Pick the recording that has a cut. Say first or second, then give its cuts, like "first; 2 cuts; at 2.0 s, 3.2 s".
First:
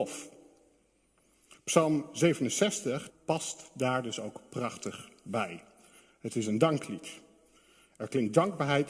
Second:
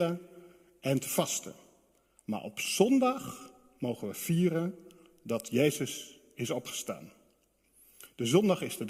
first; 1 cut; at 3.1 s